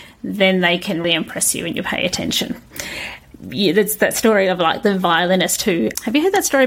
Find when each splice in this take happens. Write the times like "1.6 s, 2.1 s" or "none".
1.0 s